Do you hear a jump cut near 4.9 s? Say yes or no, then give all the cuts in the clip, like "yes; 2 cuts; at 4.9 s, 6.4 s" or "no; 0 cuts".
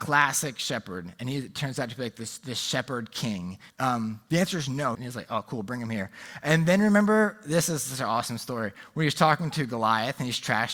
yes; 2 cuts; at 3.7 s, 4.9 s